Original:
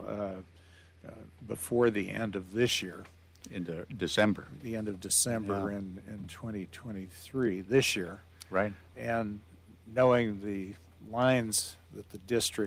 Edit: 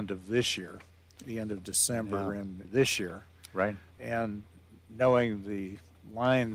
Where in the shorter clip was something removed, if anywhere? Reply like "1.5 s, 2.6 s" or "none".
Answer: 1.2 s, 2.6 s